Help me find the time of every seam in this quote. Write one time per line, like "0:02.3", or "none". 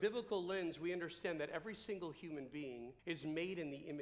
0:03.0